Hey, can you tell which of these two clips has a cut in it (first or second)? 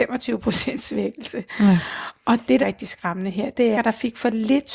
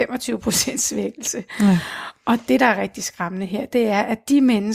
first